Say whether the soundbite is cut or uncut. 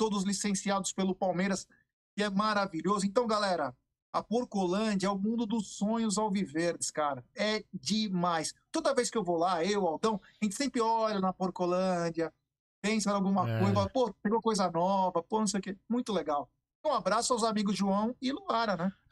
uncut